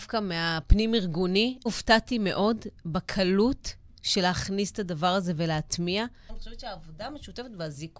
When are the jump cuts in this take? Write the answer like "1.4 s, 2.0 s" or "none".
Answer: 1.7 s, 6.3 s